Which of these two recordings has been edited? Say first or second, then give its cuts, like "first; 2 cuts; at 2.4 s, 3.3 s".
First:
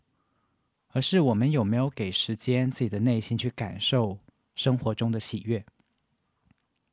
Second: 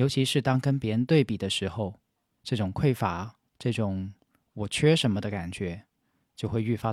second; 1 cut; at 3.5 s